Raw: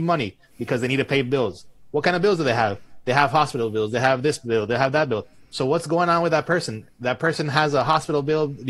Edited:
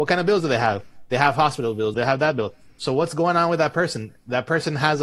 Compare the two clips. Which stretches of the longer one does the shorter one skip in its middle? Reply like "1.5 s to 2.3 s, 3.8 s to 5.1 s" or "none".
3.9 s to 4.7 s